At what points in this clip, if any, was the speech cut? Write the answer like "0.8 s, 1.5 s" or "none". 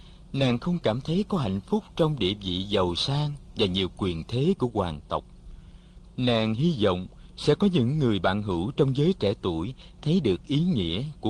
6.1 s